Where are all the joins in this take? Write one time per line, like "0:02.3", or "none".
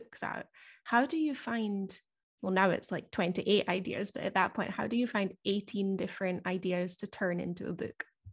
none